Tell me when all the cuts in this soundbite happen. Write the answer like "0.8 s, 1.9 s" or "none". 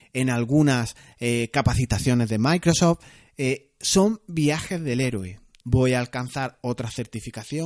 5.6 s